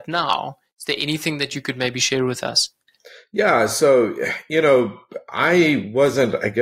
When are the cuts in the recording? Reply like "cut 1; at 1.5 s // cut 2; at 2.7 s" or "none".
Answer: none